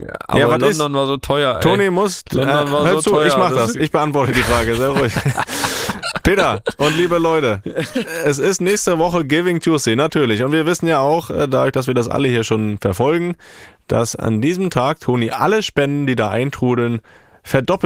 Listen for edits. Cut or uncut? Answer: uncut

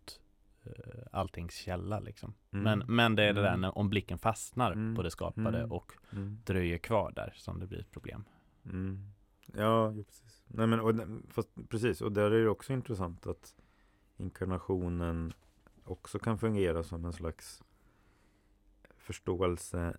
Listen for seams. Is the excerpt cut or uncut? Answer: uncut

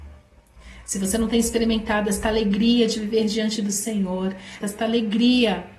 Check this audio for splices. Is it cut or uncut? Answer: cut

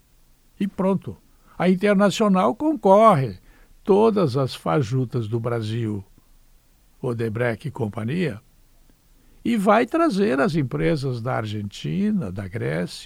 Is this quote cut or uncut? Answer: cut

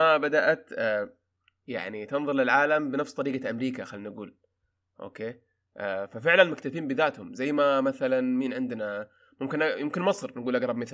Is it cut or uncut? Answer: uncut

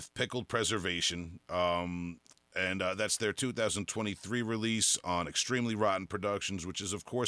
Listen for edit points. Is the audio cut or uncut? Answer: uncut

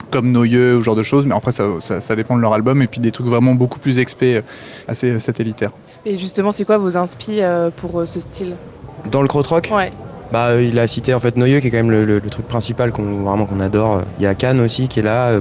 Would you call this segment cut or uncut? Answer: cut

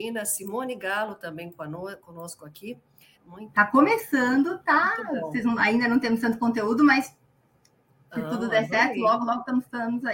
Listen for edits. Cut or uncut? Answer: cut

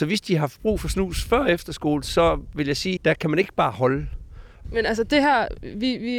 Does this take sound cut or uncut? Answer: cut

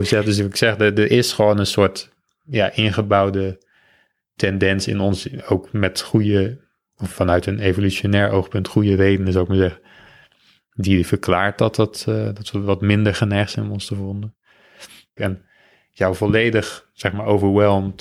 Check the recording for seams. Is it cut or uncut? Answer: cut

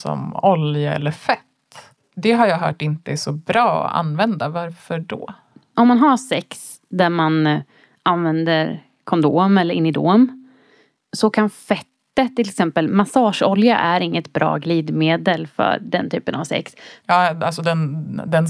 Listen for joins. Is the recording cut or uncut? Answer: cut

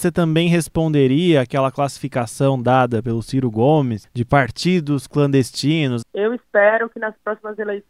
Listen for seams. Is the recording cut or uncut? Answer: cut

